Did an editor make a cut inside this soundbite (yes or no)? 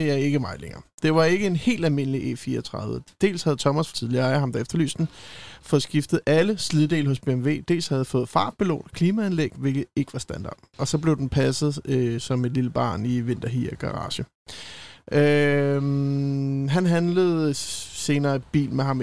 yes